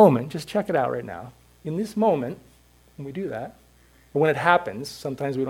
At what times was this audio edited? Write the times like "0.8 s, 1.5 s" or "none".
none